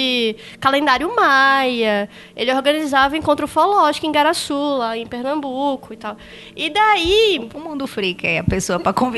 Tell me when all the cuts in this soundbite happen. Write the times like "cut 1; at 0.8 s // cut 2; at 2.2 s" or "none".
none